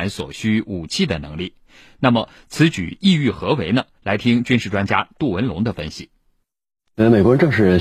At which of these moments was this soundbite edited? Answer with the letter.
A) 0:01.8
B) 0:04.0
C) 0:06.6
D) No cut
D